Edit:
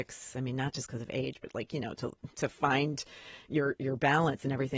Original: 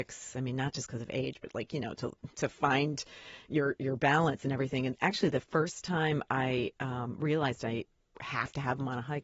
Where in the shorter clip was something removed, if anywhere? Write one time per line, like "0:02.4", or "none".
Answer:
none